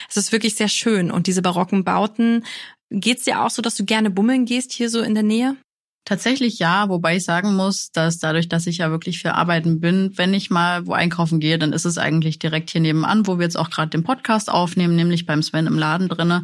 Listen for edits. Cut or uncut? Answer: uncut